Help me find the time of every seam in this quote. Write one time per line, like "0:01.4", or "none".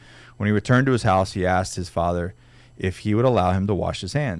none

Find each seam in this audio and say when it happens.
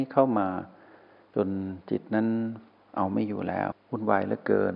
0:03.7

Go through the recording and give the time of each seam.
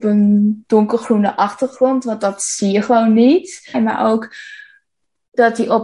0:03.7

